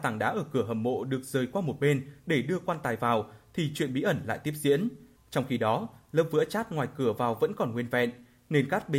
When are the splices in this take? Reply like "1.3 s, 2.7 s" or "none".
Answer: 5.2 s